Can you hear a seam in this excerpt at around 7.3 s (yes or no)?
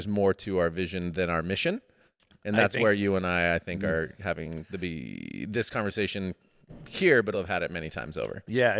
yes